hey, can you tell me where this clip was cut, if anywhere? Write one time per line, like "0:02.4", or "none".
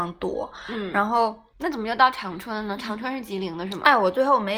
0:01.5